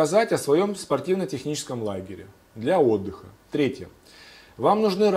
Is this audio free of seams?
no; 1 cut; at 3.4 s

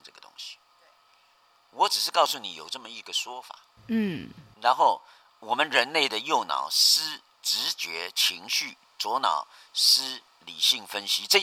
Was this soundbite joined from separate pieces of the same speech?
no; 0 cuts

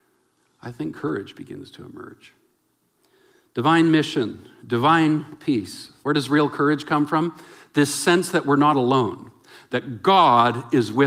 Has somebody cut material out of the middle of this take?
yes; 1 cut; at 6.0 s

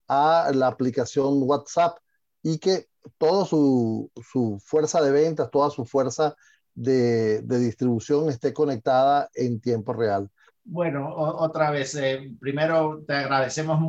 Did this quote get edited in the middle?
yes; 1 cut; at 10.5 s

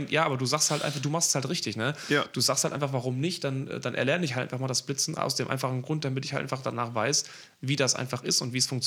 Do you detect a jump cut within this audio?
no; 0 cuts

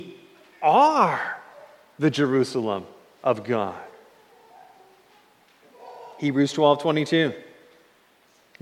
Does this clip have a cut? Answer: no; 0 cuts

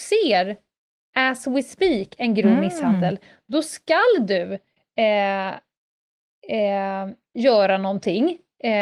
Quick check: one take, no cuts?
yes; 0 cuts

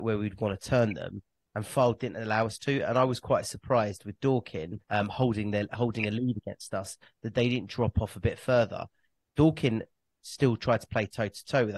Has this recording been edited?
yes; 1 cut; at 4.8 s

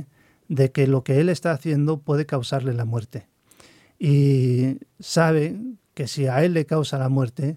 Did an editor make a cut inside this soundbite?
no; 0 cuts

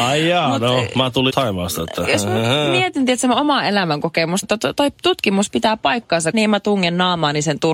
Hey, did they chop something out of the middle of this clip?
yes; 3 cuts; at 1.3 s, 4.4 s, 6.3 s

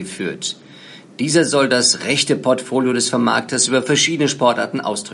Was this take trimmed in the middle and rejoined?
no; 0 cuts

